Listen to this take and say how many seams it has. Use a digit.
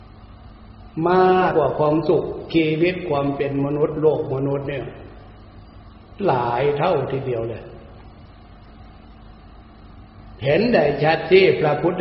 1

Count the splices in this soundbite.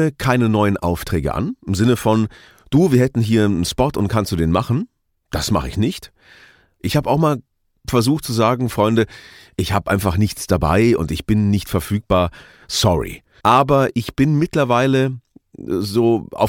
2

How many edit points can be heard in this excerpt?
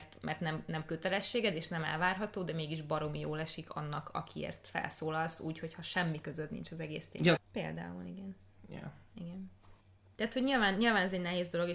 1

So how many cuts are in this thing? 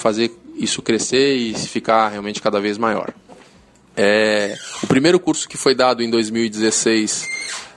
1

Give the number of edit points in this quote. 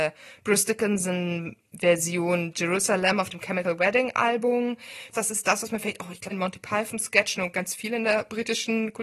2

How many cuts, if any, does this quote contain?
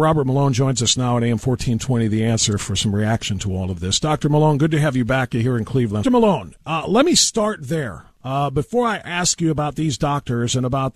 1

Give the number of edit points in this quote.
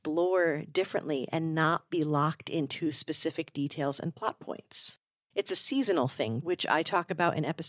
2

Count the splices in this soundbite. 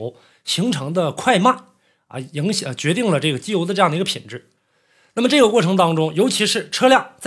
0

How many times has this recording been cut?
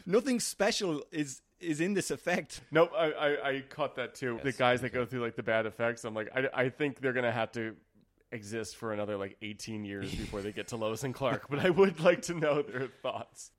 1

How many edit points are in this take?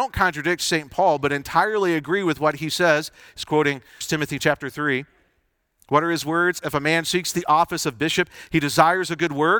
1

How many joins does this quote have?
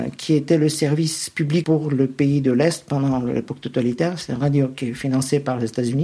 1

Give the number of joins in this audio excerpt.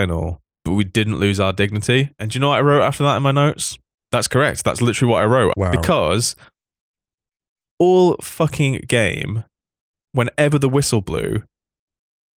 2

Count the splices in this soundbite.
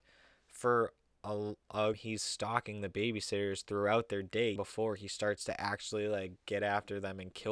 2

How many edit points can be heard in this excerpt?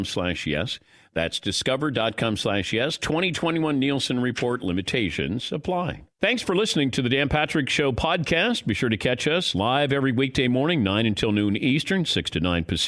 0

